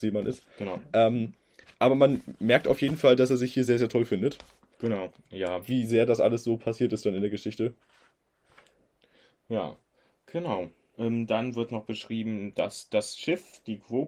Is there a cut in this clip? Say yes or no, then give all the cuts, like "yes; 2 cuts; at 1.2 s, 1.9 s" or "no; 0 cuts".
yes; 1 cut; at 5.1 s